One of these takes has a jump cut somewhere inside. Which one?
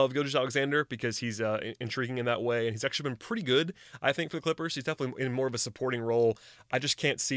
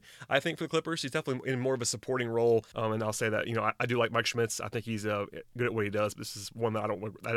second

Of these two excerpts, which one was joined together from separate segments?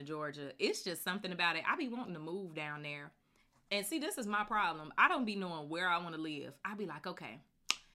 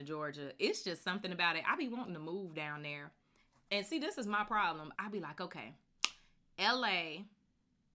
second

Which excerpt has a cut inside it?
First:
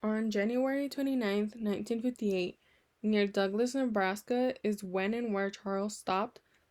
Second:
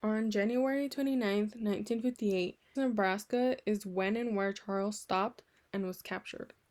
second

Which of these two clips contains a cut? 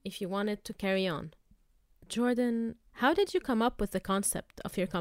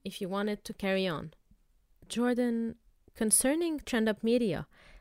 first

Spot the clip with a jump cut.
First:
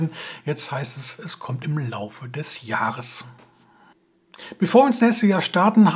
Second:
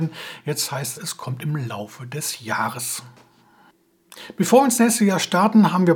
second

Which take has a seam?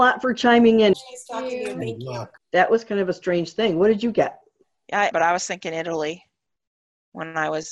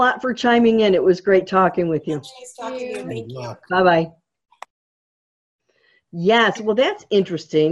first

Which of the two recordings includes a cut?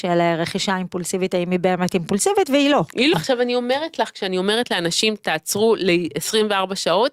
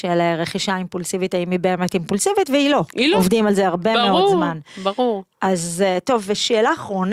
first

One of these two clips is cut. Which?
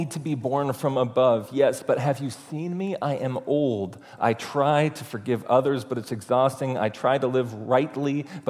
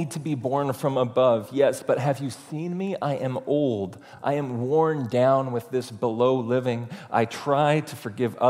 first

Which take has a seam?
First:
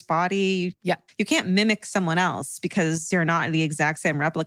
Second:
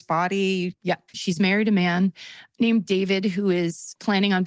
second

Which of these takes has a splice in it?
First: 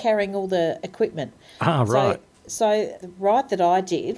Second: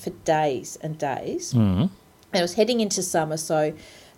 first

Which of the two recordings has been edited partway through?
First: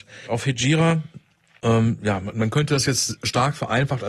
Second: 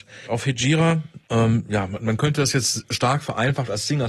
second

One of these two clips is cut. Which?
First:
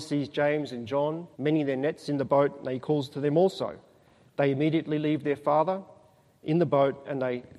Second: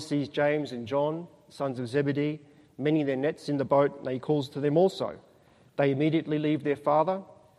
first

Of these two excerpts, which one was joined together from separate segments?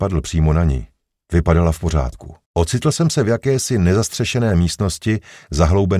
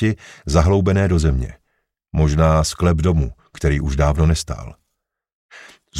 first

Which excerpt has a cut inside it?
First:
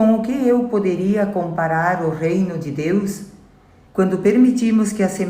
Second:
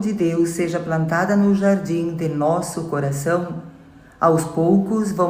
first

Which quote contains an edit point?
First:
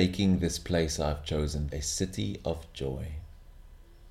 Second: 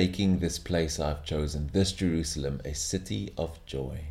first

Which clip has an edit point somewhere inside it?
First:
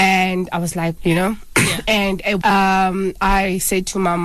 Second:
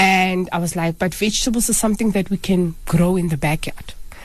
first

